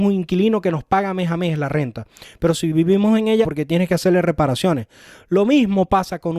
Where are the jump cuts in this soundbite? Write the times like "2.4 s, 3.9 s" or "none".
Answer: 3.4 s